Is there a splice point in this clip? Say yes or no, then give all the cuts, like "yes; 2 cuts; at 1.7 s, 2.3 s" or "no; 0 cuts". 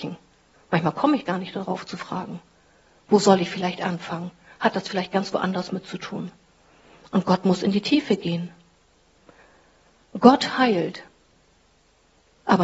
no; 0 cuts